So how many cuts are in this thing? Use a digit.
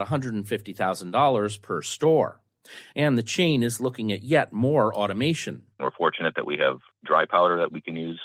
1